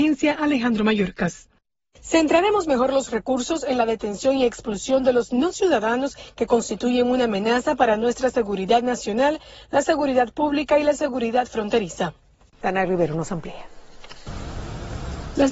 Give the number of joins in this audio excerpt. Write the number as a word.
one